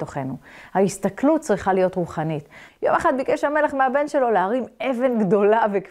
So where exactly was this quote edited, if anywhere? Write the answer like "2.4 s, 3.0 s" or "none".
2.7 s